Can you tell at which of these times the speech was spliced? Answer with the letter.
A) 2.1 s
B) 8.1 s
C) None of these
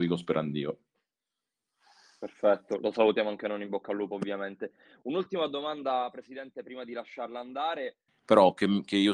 B